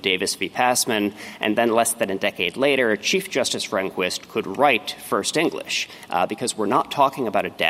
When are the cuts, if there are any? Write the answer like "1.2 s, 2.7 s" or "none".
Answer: none